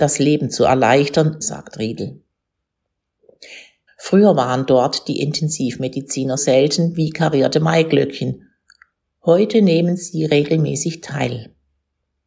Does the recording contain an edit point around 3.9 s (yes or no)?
yes